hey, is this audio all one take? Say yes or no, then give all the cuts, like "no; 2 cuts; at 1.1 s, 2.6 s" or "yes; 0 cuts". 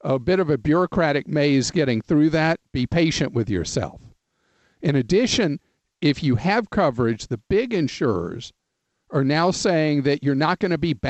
yes; 0 cuts